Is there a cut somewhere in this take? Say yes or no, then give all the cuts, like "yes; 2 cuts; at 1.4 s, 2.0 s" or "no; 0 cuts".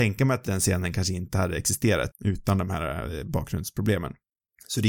yes; 1 cut; at 2.1 s